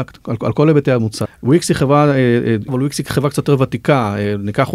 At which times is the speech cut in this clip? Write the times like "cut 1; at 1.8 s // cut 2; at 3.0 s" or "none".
cut 1; at 1.2 s // cut 2; at 2.7 s

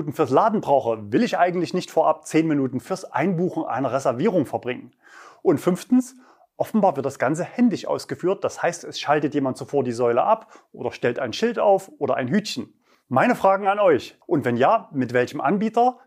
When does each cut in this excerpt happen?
cut 1; at 12.9 s // cut 2; at 14.2 s

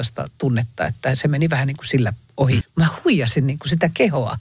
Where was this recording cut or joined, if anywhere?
cut 1; at 2.6 s

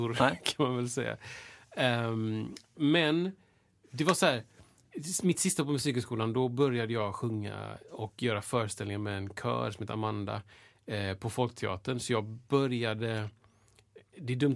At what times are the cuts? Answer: cut 1; at 2.7 s

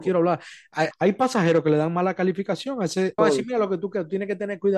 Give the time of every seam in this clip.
cut 1; at 0.9 s // cut 2; at 3.2 s

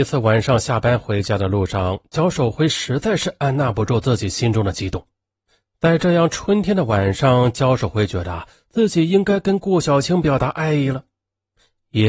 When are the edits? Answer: none

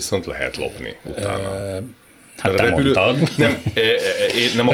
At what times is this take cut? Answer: none

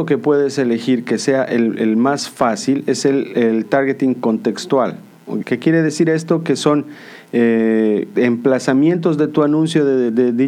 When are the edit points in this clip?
cut 1; at 5.4 s // cut 2; at 8.1 s

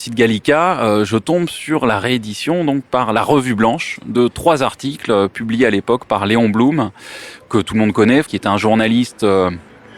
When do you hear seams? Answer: cut 1; at 4.1 s // cut 2; at 8.3 s

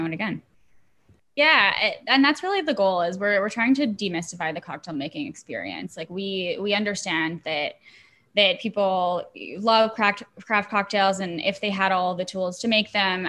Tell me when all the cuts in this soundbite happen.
cut 1; at 1.2 s

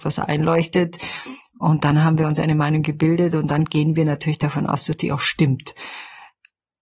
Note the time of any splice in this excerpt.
none

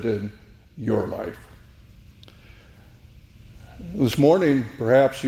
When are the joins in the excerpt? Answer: none

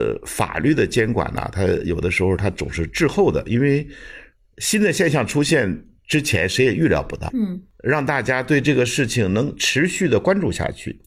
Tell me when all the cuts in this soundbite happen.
cut 1; at 7.3 s

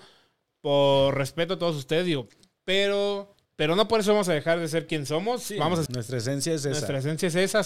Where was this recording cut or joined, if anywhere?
cut 1; at 3.5 s // cut 2; at 5.9 s

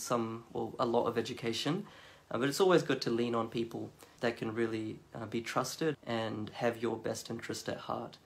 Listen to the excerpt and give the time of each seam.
cut 1; at 5.9 s

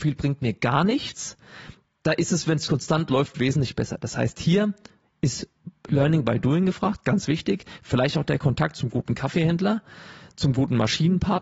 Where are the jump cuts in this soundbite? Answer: none

